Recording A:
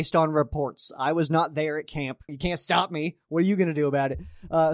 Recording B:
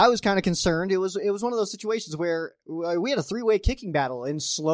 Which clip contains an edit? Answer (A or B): A